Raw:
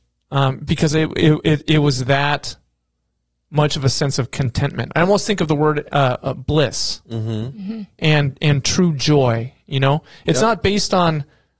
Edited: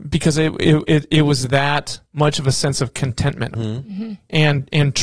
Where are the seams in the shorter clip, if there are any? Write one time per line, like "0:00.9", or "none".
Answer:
0:02.1
0:03.5